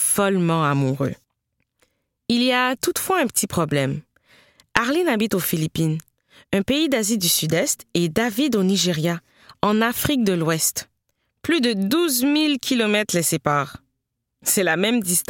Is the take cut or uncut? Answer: uncut